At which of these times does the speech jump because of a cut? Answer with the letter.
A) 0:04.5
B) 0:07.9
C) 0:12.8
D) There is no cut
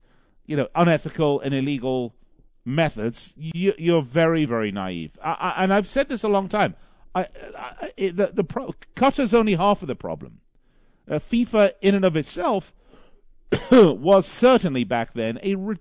A